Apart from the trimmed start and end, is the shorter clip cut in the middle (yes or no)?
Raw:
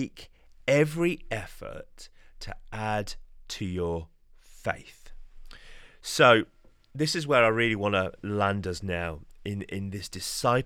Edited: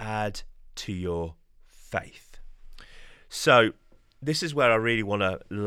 no